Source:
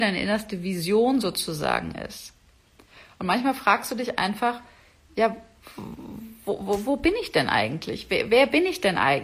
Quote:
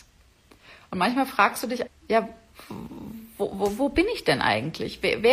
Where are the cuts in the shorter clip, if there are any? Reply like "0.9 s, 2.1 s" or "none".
1.9 s